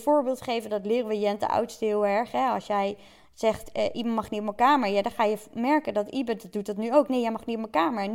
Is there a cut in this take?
no; 0 cuts

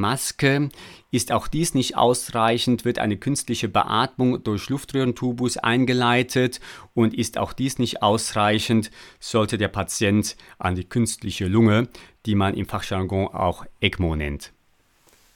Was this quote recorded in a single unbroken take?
yes; 0 cuts

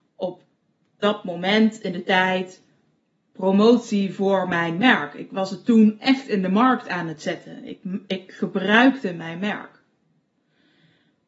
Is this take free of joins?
yes; 0 cuts

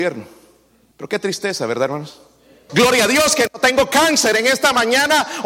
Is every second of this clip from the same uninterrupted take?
no; 2 cuts; at 0.9 s, 2.7 s

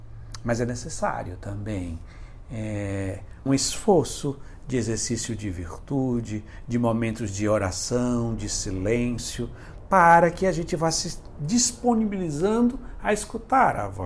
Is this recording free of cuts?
no; 1 cut; at 3.5 s

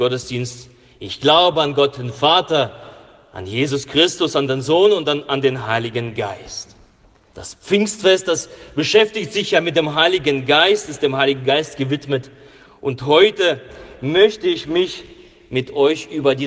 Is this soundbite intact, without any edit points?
no; 1 cut; at 7.3 s

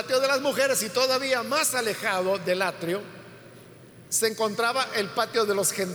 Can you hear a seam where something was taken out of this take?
no; 0 cuts

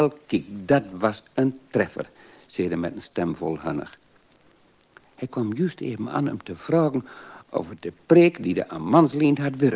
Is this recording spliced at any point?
no; 0 cuts

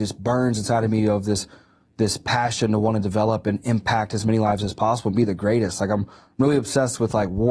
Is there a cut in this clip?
no; 0 cuts

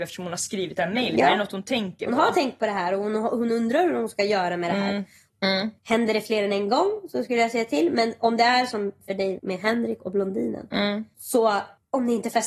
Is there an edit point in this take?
yes; 2 cuts; at 5.3 s, 9.4 s

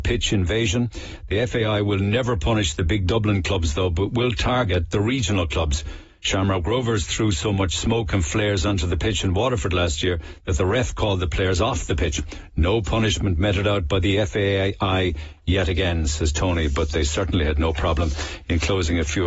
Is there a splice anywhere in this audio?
no; 0 cuts

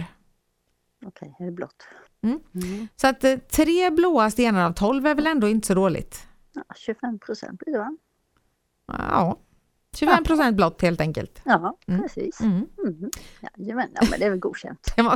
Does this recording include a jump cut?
yes; 1 cut; at 2.1 s

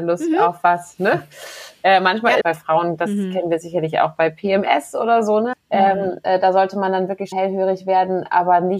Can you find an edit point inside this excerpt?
yes; 3 cuts; at 2.4 s, 5.5 s, 7.3 s

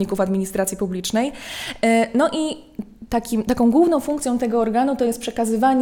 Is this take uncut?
yes; 0 cuts

